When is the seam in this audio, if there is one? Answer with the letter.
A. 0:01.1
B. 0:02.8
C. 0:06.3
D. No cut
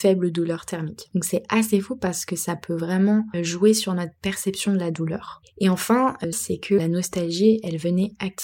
C